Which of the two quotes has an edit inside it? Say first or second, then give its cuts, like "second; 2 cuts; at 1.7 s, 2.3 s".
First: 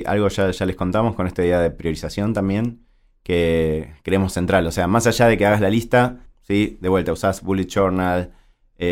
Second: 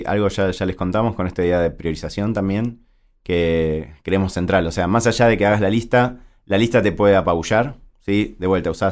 first; 1 cut; at 6.3 s